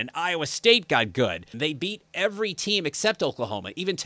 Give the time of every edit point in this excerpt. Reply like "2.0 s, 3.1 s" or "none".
1.5 s